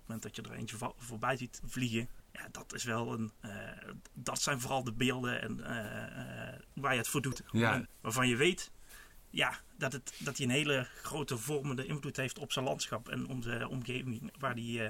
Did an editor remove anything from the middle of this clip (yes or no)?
no